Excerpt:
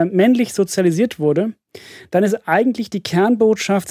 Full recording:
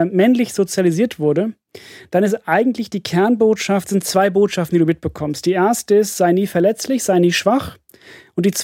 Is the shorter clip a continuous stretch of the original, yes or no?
yes